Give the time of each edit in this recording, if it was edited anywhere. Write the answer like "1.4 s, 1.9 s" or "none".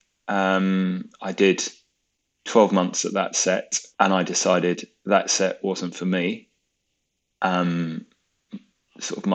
3.9 s